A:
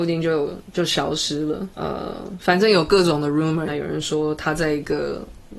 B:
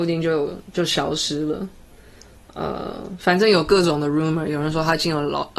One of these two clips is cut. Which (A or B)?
A